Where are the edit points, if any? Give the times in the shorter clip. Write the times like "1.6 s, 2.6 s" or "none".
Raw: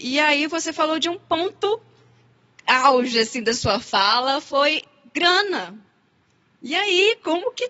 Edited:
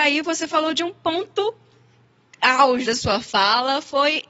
2.8 s